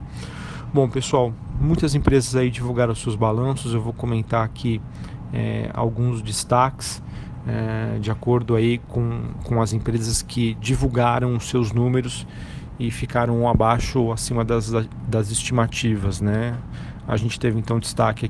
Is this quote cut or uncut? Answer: uncut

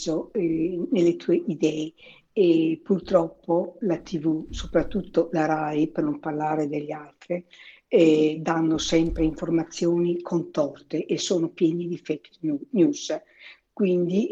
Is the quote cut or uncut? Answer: uncut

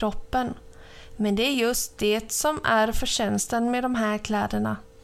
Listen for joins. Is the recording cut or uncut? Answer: uncut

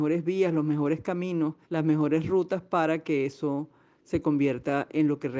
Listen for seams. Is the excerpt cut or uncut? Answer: cut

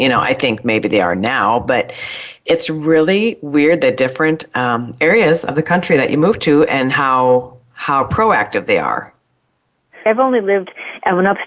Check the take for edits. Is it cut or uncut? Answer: cut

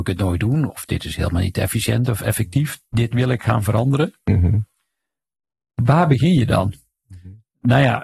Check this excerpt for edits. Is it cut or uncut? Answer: uncut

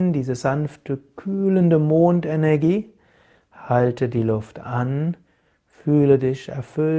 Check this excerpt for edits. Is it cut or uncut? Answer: uncut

